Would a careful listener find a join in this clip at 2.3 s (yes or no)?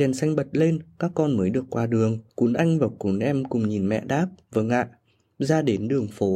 yes